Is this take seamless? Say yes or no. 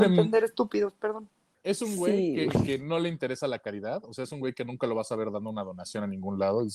yes